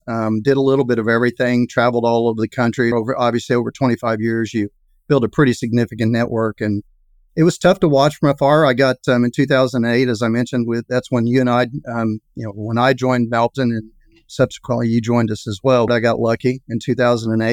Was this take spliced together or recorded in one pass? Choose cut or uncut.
cut